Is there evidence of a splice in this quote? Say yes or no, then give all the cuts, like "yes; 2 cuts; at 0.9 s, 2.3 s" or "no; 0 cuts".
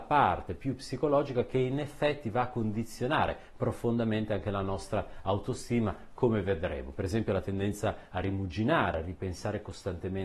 no; 0 cuts